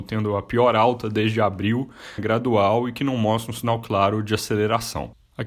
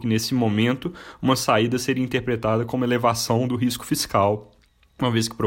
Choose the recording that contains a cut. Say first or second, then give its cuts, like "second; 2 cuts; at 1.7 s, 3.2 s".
first; 1 cut; at 2.2 s